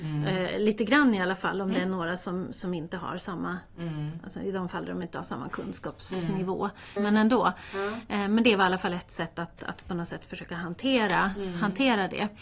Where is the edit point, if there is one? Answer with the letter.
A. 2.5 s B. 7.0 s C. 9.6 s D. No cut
B